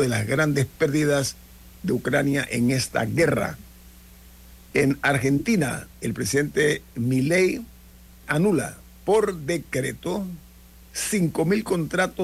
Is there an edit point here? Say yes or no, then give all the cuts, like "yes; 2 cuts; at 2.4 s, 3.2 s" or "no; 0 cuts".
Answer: yes; 2 cuts; at 4.7 s, 8.2 s